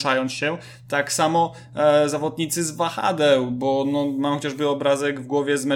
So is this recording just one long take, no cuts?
yes; 0 cuts

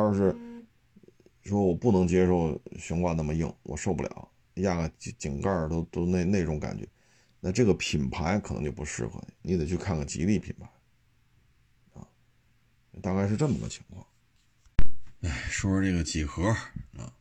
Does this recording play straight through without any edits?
yes; 0 cuts

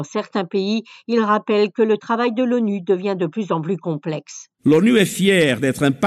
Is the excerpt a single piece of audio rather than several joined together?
no; 1 cut; at 4.5 s

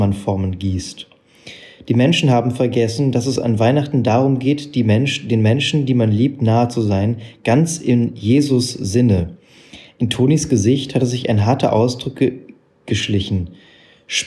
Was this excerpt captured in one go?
yes; 0 cuts

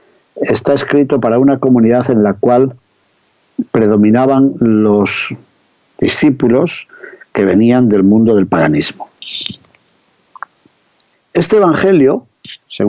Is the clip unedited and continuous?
no; 1 cut; at 11.1 s

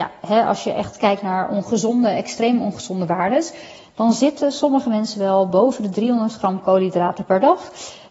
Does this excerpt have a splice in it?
no; 0 cuts

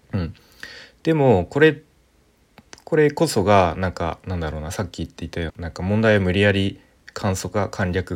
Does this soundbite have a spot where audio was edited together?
yes; 1 cut; at 5.5 s

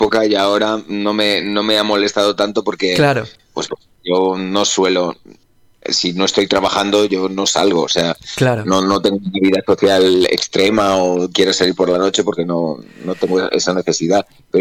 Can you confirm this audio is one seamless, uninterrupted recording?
yes; 0 cuts

